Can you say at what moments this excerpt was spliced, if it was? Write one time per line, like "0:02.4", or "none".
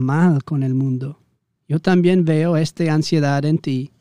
0:01.6